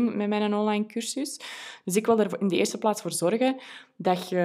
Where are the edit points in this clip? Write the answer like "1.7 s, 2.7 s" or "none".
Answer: none